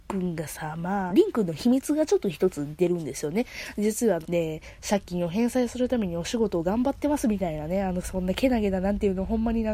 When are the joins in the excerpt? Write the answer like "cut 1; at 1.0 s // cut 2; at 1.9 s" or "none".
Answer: cut 1; at 1.1 s // cut 2; at 4.2 s